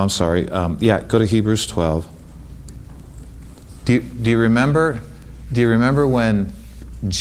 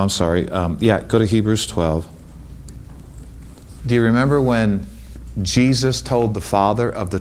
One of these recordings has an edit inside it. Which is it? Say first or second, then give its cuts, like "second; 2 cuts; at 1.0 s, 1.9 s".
second; 1 cut; at 3.8 s